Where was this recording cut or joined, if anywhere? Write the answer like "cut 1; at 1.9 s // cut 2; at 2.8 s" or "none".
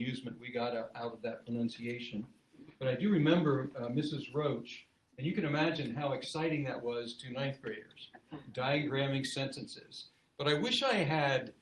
cut 1; at 5.0 s